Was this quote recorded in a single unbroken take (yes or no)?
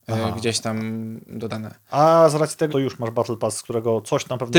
no